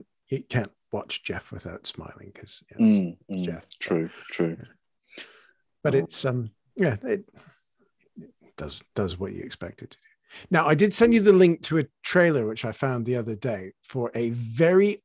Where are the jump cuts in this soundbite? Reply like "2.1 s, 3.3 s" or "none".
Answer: none